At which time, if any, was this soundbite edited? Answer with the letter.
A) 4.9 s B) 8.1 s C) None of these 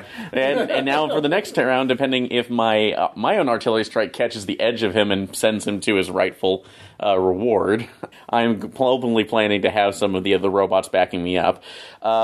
B